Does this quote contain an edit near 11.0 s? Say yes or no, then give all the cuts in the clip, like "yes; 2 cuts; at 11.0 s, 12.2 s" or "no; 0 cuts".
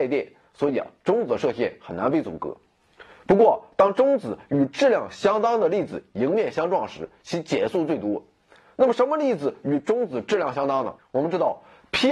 yes; 1 cut; at 11.0 s